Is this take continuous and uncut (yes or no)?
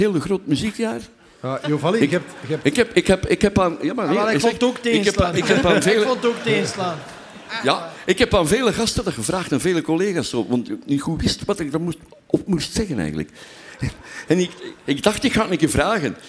yes